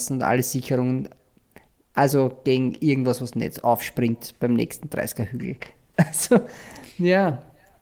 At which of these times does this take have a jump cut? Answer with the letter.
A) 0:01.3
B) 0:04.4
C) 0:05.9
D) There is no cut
D